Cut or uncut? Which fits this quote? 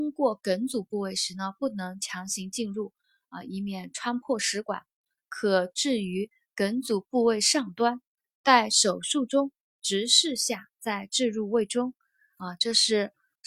uncut